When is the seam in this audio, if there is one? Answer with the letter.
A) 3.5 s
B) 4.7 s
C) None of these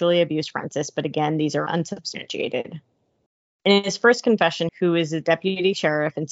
B